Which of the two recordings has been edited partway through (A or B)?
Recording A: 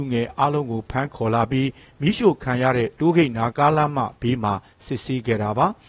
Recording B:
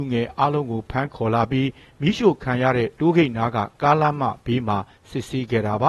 A